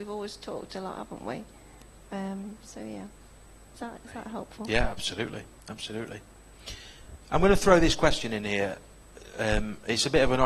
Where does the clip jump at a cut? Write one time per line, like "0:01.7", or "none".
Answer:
none

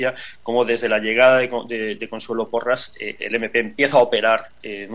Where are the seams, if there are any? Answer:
0:03.2

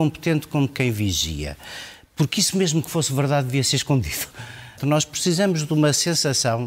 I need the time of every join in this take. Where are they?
0:04.8

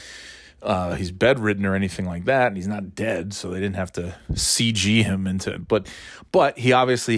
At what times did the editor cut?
none

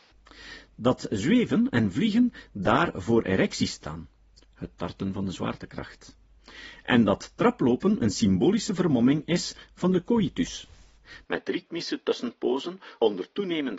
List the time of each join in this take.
none

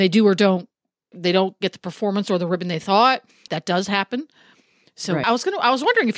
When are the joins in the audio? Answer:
0:01.1
0:03.5
0:05.2

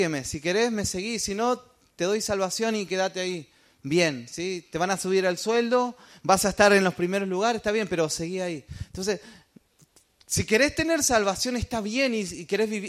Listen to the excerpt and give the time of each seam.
0:08.9

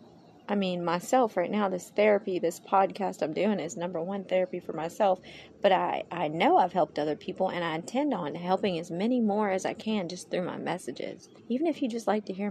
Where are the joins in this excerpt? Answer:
0:11.4

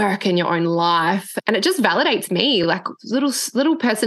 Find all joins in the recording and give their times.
none

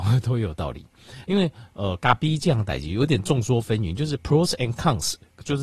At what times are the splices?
0:01.2

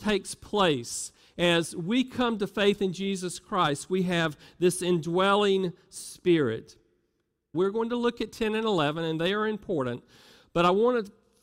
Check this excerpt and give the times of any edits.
0:07.5

